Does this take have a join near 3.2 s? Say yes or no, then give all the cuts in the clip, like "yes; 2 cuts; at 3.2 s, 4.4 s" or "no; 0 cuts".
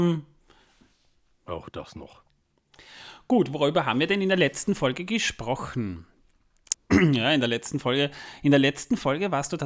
no; 1 cut; at 6.7 s